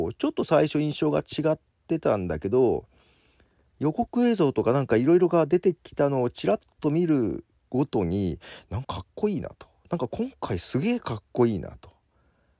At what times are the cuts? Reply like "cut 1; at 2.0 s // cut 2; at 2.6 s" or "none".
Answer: cut 1; at 8.8 s